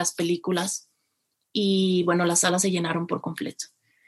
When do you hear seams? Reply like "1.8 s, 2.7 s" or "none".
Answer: none